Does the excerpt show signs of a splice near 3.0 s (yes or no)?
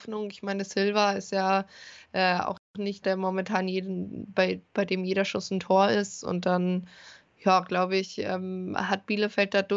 yes